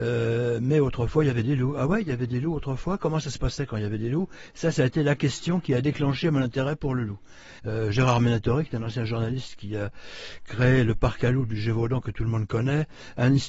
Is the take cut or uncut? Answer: cut